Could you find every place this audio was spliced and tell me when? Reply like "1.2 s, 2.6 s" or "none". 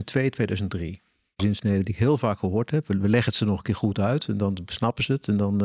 1.4 s